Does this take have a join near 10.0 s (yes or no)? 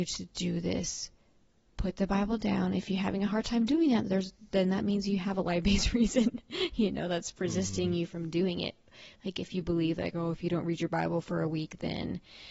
no